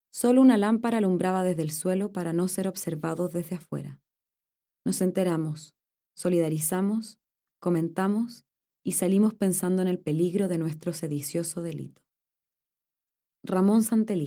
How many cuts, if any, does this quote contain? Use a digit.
1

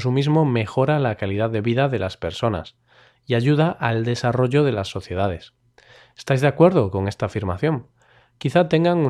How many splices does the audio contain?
0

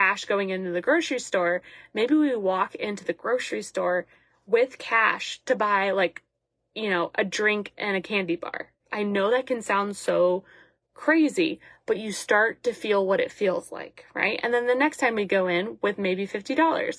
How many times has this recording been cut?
0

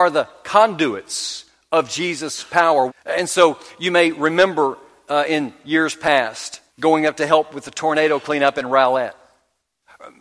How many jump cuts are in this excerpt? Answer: 2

